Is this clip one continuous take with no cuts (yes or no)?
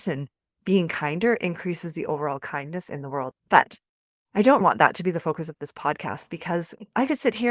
no